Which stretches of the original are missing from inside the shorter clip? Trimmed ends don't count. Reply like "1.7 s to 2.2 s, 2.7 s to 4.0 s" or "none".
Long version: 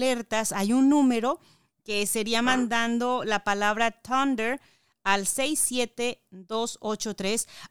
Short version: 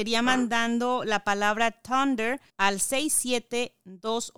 4.7 s to 5.0 s